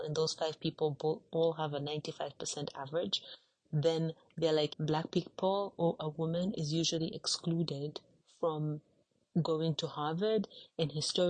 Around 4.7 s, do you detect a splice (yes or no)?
yes